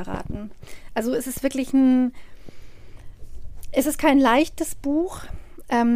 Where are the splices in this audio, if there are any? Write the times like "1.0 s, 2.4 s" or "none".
none